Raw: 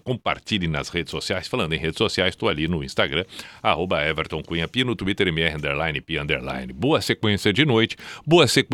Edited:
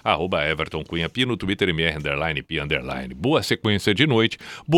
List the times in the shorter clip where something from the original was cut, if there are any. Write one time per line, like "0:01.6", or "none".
none